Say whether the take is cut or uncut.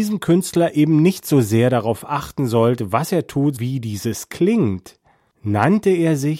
cut